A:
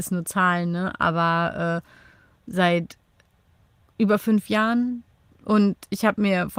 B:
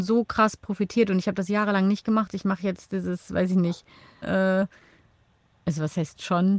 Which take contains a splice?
B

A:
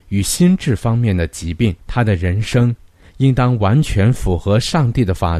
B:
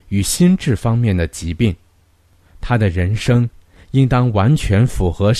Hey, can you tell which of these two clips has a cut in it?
A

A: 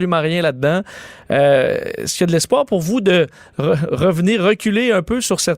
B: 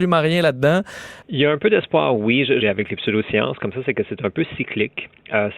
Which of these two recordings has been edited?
B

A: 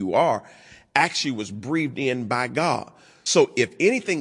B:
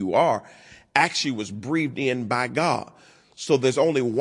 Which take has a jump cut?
A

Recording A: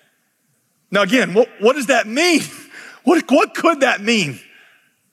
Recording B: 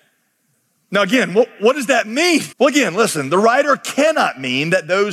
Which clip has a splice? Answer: B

